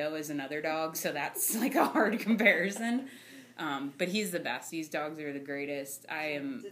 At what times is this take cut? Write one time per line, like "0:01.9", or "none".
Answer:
0:04.7